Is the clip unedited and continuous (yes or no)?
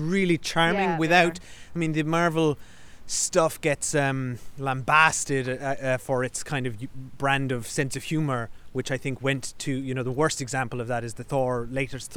yes